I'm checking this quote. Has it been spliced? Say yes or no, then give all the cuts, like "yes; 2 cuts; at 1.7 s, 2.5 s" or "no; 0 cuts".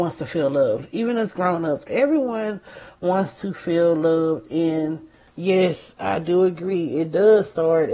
yes; 1 cut; at 1.9 s